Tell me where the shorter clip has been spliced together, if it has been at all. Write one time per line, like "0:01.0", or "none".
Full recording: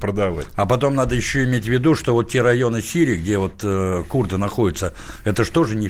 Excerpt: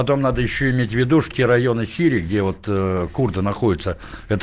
0:01.3